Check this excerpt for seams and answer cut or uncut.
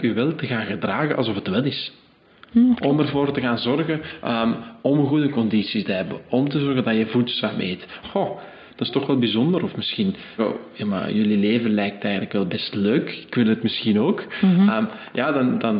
cut